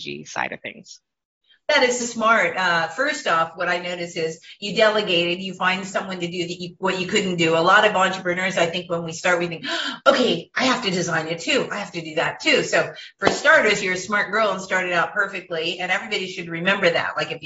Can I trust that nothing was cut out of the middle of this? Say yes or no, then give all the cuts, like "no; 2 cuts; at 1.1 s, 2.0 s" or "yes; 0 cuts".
no; 1 cut; at 2.0 s